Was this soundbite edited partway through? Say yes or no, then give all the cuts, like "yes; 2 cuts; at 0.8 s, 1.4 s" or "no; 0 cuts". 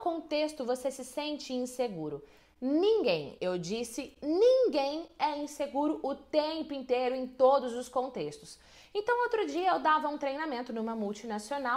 no; 0 cuts